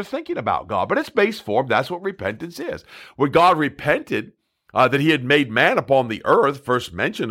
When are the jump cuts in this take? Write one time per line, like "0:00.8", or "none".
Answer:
none